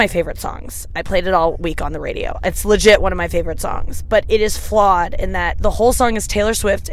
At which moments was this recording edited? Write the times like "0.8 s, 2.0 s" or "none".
none